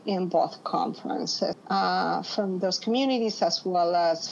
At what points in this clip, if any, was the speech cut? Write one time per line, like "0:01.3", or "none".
0:01.5